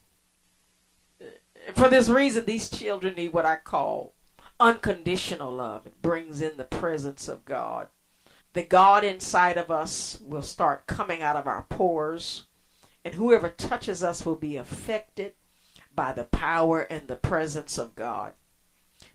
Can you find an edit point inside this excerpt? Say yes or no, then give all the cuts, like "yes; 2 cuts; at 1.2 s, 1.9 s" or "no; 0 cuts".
yes; 2 cuts; at 5.8 s, 8.4 s